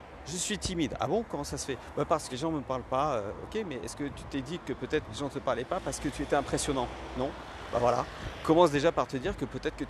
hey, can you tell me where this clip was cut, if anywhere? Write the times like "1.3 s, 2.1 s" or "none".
2.3 s